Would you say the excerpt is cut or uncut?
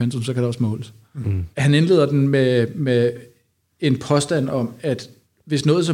cut